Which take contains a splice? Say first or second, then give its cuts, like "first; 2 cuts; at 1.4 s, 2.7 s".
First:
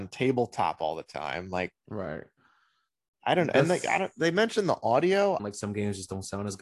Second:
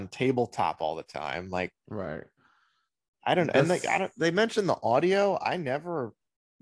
first; 1 cut; at 5.4 s